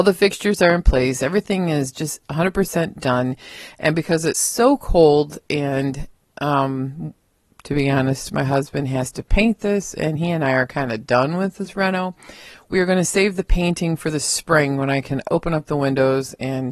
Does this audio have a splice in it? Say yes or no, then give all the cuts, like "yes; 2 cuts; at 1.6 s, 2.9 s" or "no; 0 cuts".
no; 0 cuts